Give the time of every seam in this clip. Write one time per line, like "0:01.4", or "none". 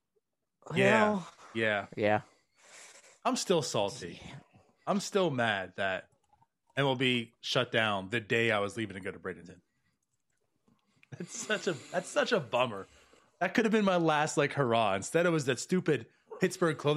none